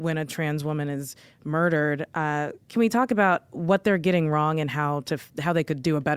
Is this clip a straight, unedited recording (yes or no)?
yes